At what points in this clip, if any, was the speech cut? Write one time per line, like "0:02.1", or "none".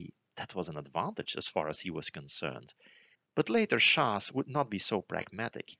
0:03.1